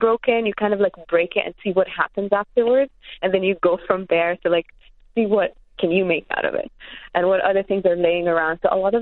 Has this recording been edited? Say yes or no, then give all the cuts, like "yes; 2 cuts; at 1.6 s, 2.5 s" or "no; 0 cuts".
no; 0 cuts